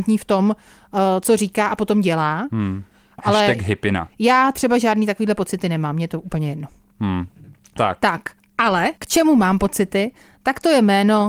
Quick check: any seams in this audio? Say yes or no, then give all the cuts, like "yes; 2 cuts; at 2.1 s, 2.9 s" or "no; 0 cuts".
yes; 2 cuts; at 3.2 s, 9.0 s